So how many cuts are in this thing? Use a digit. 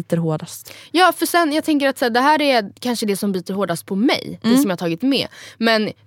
0